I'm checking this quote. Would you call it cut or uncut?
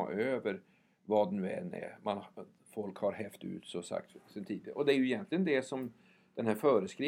uncut